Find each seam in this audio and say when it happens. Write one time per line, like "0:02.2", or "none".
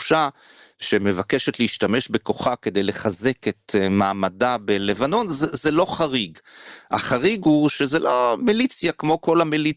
none